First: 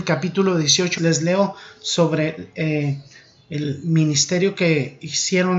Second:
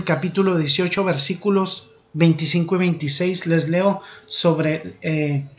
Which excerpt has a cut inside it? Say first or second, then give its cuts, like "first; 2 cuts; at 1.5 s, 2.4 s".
first; 1 cut; at 1.0 s